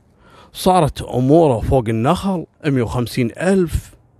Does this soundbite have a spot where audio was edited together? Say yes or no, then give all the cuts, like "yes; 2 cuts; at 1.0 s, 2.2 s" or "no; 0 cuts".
yes; 1 cut; at 2.5 s